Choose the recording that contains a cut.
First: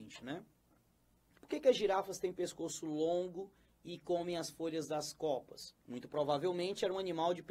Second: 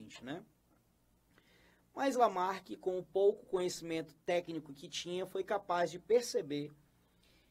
first; 2 cuts; at 1.4 s, 5.8 s

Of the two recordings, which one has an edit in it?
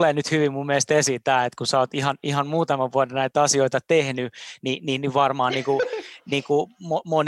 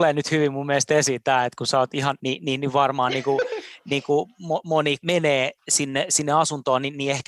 second; 2 cuts; at 2.2 s, 5.0 s

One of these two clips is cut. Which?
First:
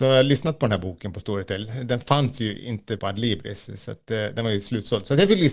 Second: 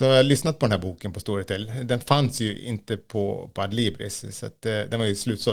first; 1 cut; at 3.0 s

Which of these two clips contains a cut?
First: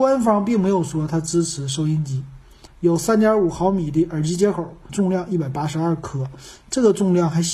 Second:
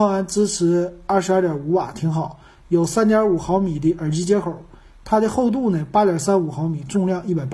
first; 2 cuts; at 2.7 s, 4.9 s

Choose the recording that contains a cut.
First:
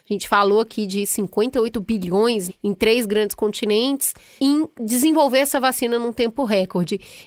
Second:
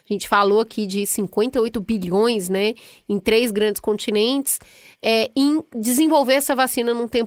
first; 2 cuts; at 2.5 s, 4.4 s

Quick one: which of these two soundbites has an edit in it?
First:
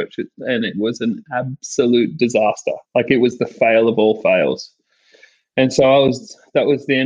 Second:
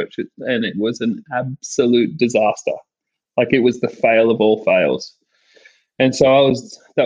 first; 1 cut; at 2.8 s

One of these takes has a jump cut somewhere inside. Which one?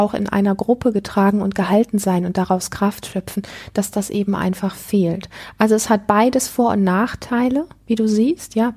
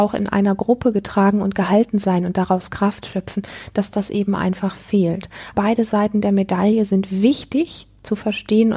second; 1 cut; at 5.5 s

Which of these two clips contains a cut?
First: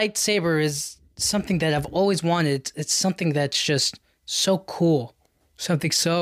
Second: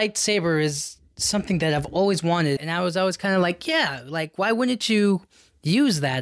second; 1 cut; at 2.6 s

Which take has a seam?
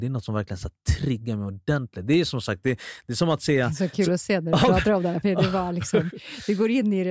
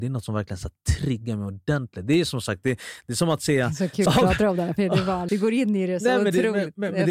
second; 2 cuts; at 4.1 s, 5.3 s

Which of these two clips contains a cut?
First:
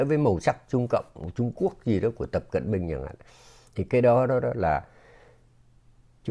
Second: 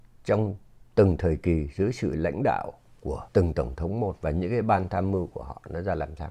second; 1 cut; at 3.3 s

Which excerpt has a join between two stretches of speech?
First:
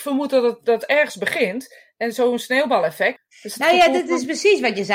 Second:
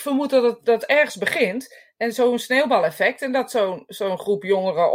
first; 1 cut; at 3.2 s

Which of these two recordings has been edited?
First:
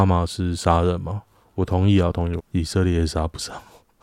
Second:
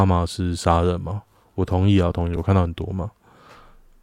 first; 1 cut; at 2.4 s

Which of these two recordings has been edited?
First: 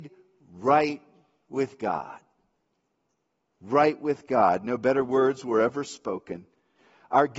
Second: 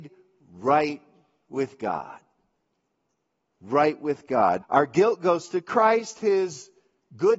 second; 1 cut; at 4.6 s

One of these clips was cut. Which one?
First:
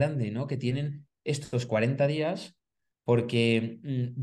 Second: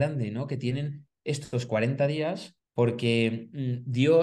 second; 1 cut; at 2.7 s

